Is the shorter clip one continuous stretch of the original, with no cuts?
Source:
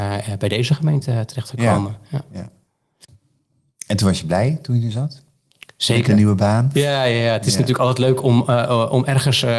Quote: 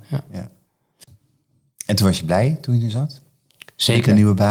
yes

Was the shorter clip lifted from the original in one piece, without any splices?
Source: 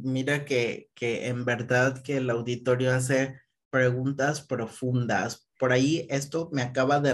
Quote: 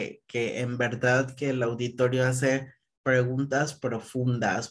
yes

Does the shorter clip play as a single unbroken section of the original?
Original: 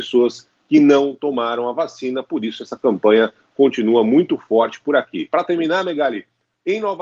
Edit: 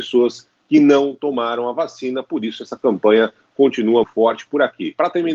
no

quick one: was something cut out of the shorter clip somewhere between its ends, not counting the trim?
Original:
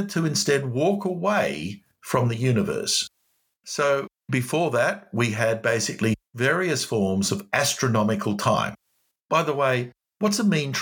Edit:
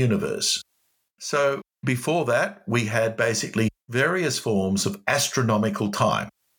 no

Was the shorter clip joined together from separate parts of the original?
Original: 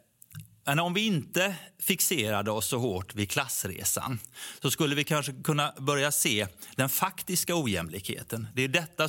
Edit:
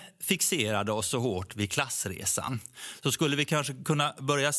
no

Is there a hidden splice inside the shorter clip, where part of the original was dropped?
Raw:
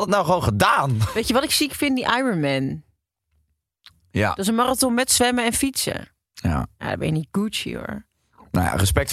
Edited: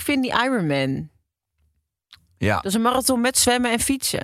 no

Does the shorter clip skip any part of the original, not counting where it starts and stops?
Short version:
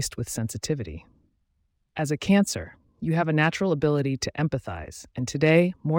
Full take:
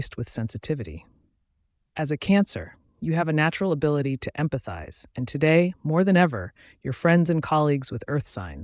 no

